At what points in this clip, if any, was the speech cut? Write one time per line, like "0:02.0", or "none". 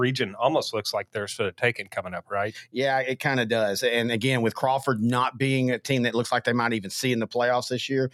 none